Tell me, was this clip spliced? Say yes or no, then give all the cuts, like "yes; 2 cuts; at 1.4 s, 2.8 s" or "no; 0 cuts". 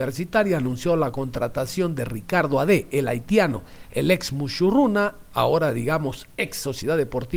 no; 0 cuts